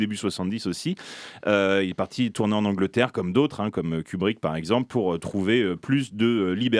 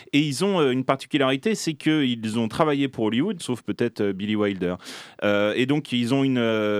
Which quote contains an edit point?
second; 1 cut; at 3.4 s

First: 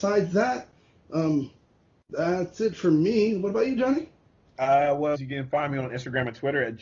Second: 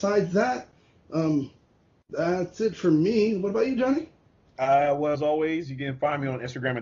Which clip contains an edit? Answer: first; 1 cut; at 5.1 s

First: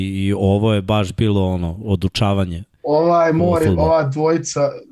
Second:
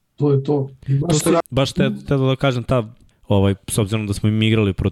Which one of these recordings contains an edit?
second; 2 cuts; at 1.4 s, 3.1 s

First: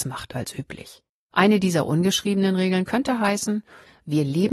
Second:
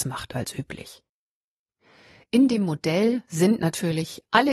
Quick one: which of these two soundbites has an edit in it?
first; 1 cut; at 1.3 s

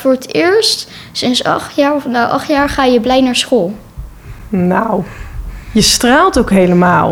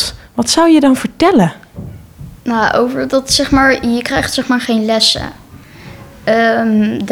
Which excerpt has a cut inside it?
second; 1 cut; at 2.4 s

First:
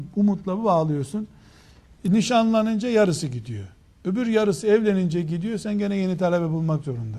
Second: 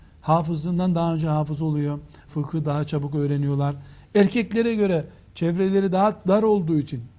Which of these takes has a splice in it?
second; 1 cut; at 2.3 s

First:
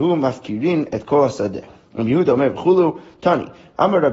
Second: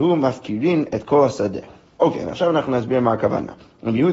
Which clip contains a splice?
first; 1 cut; at 1.8 s

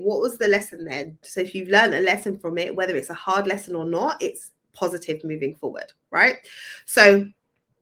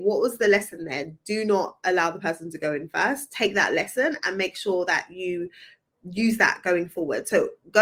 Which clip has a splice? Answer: first; 1 cut; at 1.2 s

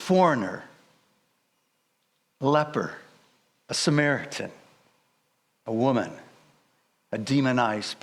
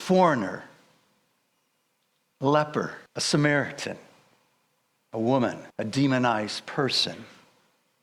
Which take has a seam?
second; 2 cuts; at 3.1 s, 5.7 s

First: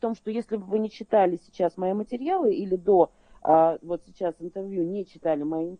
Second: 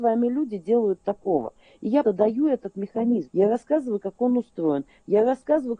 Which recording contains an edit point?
second; 2 cuts; at 2.0 s, 3.3 s

